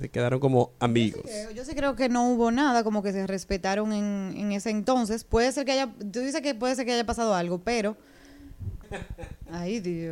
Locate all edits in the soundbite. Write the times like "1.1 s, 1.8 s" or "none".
8.8 s